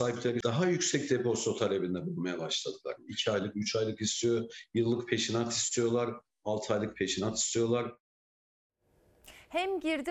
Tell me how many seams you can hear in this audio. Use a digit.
0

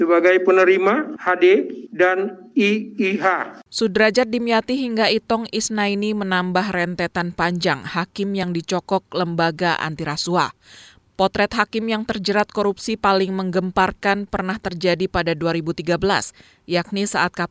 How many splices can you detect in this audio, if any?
1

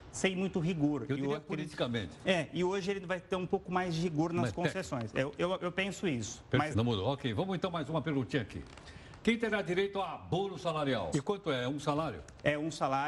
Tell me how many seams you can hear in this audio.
2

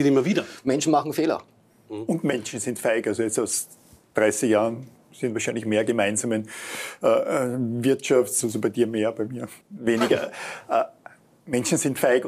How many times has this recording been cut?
2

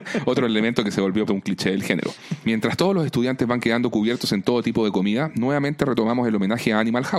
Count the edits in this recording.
2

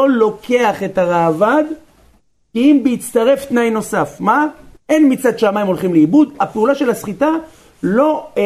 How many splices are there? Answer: 2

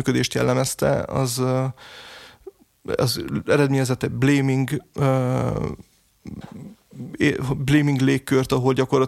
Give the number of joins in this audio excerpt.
0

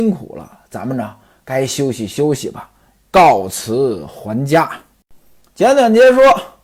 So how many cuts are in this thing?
0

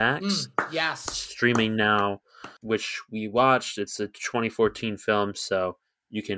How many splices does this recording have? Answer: 1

